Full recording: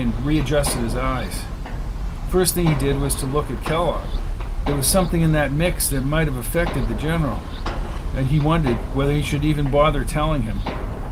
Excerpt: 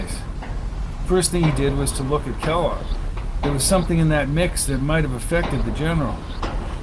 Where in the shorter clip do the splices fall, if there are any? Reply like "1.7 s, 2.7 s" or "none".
none